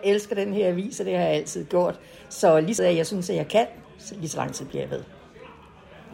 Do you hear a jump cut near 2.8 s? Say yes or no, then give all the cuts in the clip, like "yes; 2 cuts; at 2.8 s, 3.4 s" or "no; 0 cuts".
yes; 1 cut; at 2.8 s